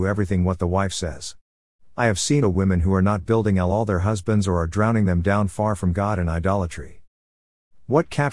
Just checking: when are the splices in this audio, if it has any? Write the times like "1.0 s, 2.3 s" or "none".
2.4 s